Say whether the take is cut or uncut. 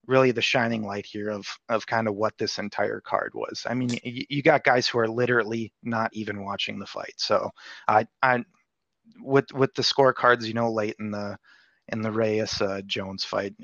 uncut